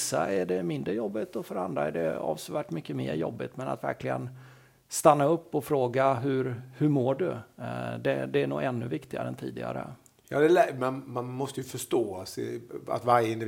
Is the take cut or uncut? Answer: uncut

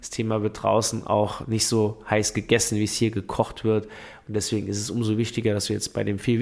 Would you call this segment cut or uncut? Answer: uncut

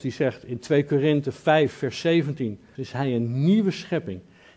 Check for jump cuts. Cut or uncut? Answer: cut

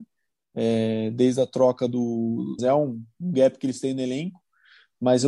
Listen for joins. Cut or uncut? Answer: cut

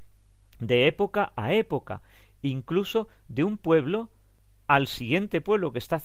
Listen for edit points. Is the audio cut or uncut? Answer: uncut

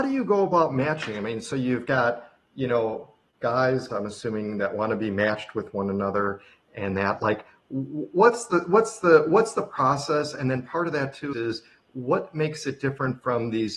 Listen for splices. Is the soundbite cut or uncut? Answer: cut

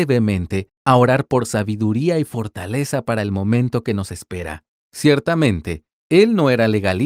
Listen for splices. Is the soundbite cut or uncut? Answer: cut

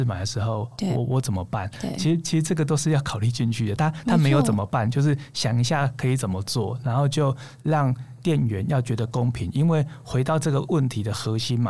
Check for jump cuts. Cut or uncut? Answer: uncut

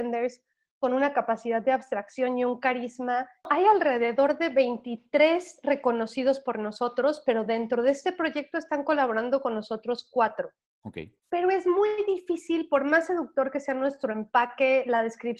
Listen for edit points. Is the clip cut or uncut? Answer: cut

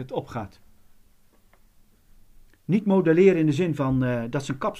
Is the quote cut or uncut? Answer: cut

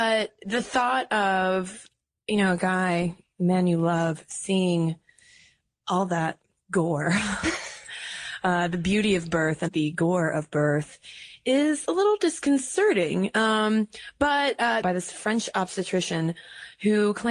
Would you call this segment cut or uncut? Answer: cut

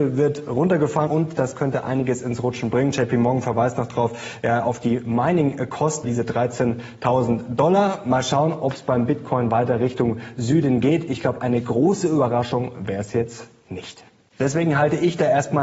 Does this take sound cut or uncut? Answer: cut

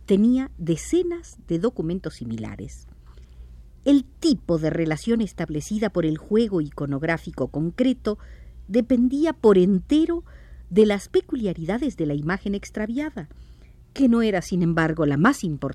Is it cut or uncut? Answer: uncut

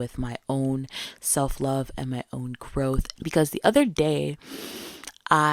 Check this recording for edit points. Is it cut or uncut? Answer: cut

